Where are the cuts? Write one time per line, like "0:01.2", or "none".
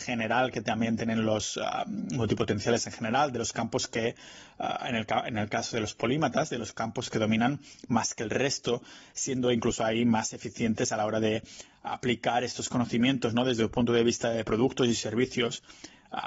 none